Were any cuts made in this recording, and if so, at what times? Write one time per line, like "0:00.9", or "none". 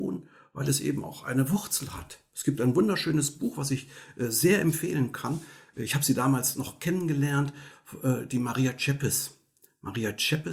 none